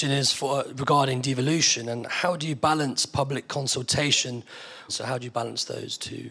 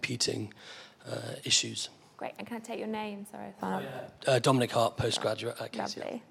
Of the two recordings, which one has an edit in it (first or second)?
first